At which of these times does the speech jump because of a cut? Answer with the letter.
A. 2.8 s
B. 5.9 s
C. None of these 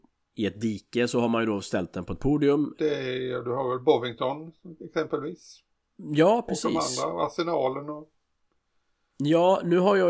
A